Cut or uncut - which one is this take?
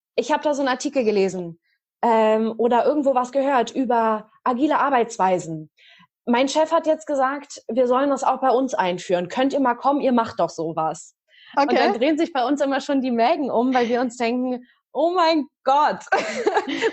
uncut